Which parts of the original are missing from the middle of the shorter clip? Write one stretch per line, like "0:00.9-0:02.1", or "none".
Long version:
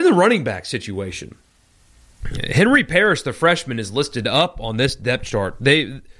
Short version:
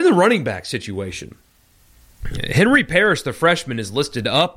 none